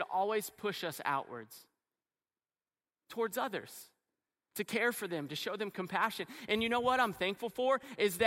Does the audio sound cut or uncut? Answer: cut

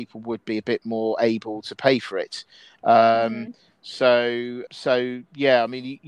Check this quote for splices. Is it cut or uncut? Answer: cut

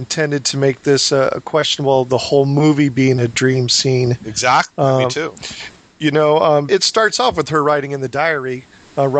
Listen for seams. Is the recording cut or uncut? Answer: cut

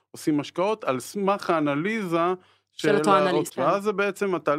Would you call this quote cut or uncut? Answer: cut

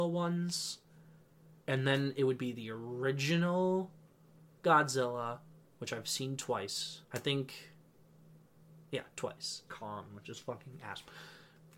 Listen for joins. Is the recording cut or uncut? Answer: cut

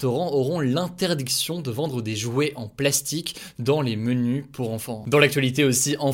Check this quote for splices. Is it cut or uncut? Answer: uncut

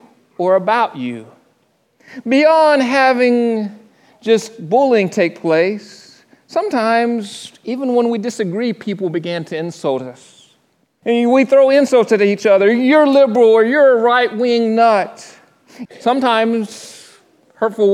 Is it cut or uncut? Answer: cut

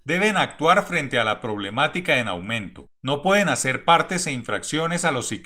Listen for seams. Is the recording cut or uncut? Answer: cut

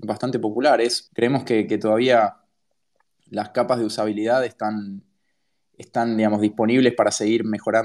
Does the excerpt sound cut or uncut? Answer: cut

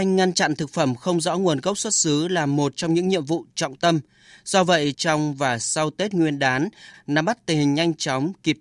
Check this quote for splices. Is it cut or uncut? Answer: cut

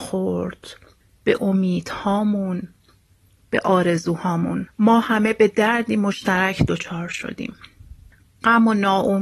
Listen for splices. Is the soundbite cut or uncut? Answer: uncut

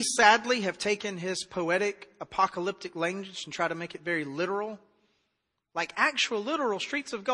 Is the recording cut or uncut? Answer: uncut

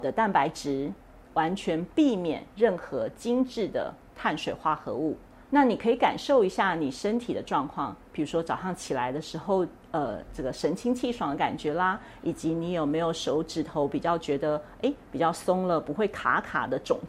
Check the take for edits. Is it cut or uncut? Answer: cut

